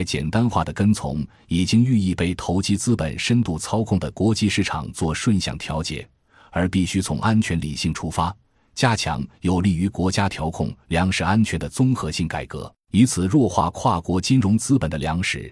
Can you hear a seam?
no; 0 cuts

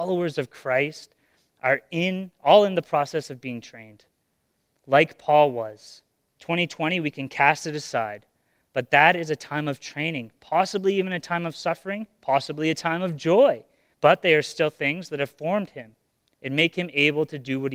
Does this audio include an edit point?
yes; 2 cuts; at 6.4 s, 13.9 s

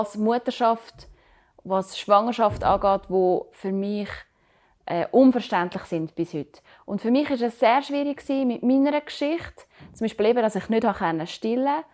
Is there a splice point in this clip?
no; 0 cuts

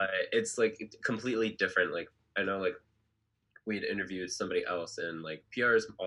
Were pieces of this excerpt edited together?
no; 0 cuts

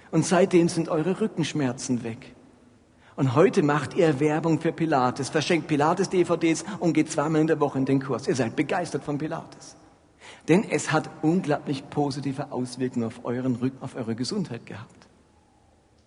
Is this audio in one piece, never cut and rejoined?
no; 1 cut; at 13.8 s

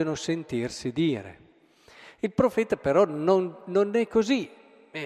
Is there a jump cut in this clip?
no; 0 cuts

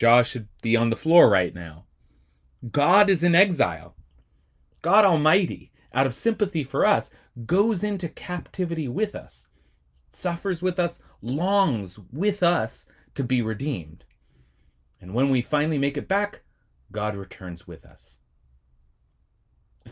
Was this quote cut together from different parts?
no; 0 cuts

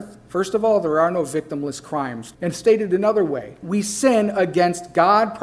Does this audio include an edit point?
yes; 2 cuts; at 2.3 s, 3.6 s

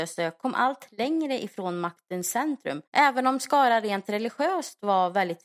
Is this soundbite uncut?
no; 1 cut; at 2.9 s

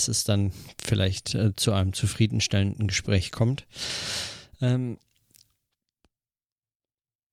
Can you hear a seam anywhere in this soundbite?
no; 0 cuts

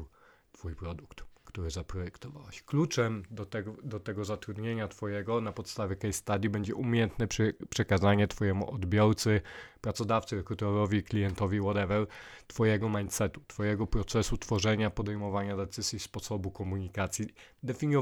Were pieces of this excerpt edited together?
no; 0 cuts

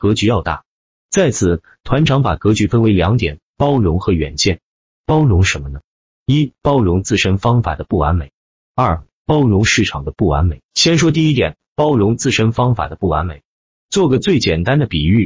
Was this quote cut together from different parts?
no; 0 cuts

